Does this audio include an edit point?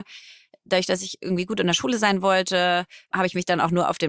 yes; 1 cut; at 3.1 s

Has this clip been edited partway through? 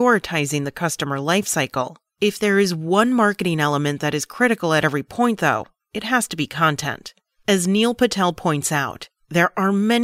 no; 0 cuts

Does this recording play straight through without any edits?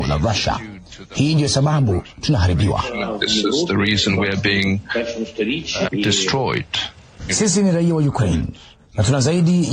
no; 2 cuts; at 5.9 s, 7.3 s

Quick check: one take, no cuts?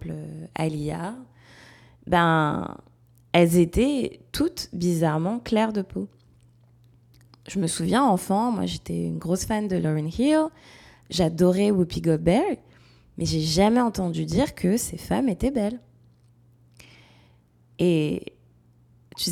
yes; 0 cuts

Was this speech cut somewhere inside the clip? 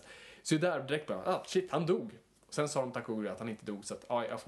no; 0 cuts

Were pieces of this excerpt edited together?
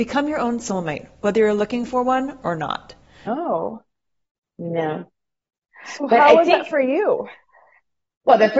yes; 1 cut; at 3.3 s

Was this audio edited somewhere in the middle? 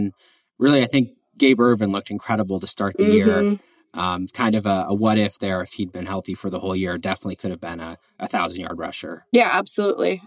no; 0 cuts

